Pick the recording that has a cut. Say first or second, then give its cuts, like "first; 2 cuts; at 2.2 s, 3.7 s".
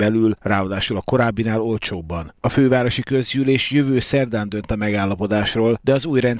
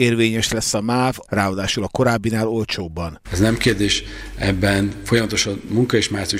second; 2 cuts; at 1.2 s, 3.2 s